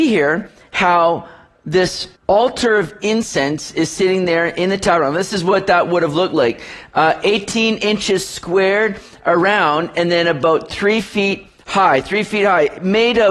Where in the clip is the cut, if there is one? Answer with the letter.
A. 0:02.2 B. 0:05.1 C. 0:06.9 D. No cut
A